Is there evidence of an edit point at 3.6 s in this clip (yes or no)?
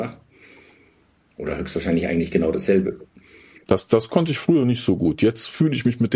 yes